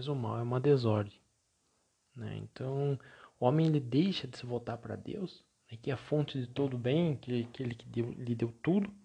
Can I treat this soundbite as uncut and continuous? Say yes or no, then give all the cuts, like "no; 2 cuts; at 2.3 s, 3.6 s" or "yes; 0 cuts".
yes; 0 cuts